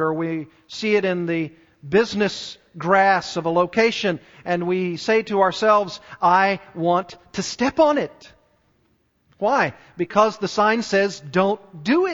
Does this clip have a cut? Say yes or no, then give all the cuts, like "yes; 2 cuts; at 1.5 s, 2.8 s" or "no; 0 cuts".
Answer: no; 0 cuts